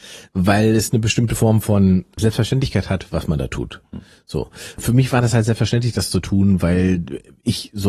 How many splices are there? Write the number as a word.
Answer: zero